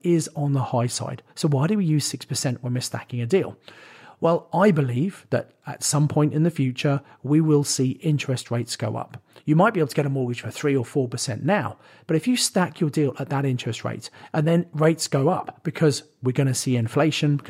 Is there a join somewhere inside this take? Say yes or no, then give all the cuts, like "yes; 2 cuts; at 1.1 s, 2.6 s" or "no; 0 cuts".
no; 0 cuts